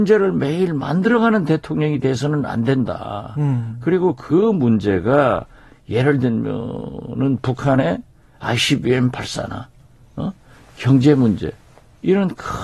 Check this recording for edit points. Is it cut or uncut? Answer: uncut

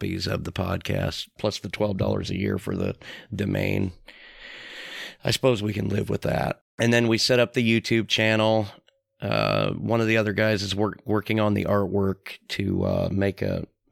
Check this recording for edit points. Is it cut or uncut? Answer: cut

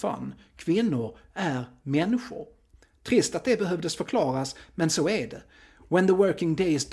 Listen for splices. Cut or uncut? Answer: uncut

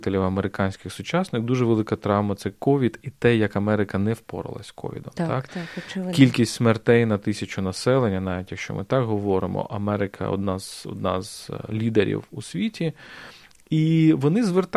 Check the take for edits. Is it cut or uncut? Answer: uncut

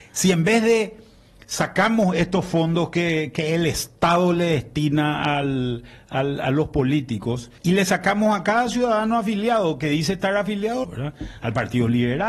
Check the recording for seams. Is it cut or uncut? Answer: cut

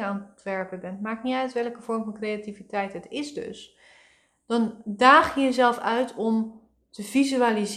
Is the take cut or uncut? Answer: uncut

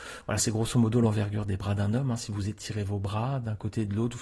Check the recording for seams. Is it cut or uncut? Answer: uncut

